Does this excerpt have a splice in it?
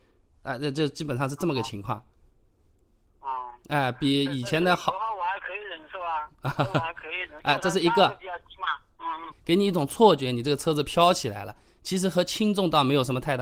yes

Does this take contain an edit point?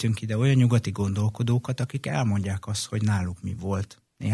no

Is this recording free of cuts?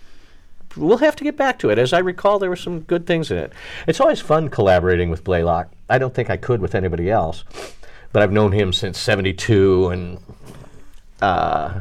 yes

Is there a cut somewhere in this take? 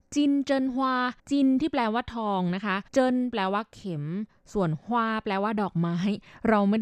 yes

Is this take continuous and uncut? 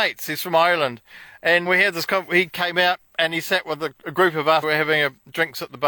no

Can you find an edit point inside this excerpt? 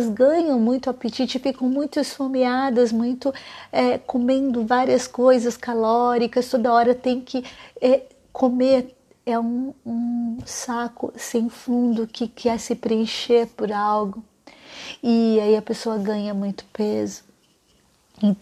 no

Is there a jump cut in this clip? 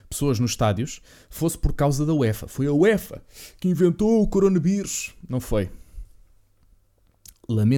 no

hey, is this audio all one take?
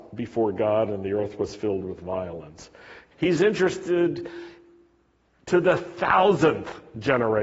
no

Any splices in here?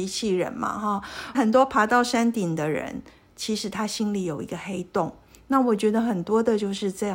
yes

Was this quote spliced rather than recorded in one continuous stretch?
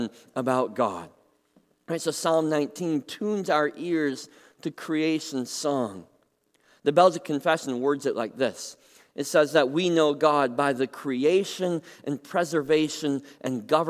no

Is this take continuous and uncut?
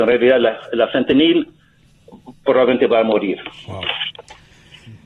yes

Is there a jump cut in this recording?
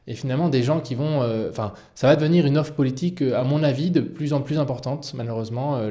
no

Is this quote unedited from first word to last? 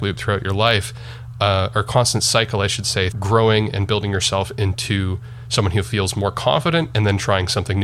no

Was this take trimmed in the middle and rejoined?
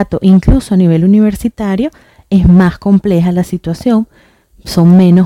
no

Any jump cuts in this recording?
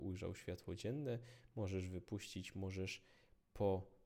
no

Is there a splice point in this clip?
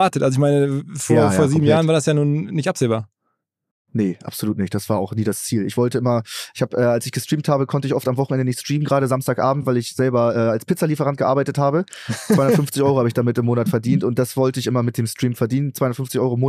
no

